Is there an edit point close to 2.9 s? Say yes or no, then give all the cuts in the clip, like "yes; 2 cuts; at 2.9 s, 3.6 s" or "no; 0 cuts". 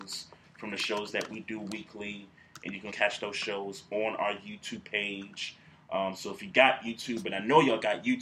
yes; 1 cut; at 2.9 s